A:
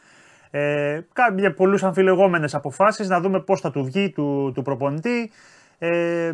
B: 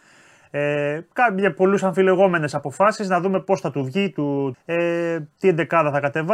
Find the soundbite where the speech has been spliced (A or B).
B